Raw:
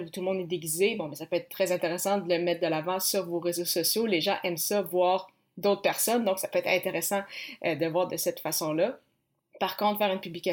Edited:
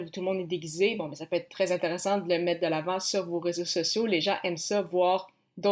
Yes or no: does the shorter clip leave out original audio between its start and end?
no